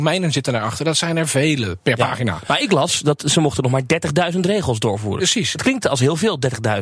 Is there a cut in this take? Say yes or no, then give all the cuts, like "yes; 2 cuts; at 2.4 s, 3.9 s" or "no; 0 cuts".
no; 0 cuts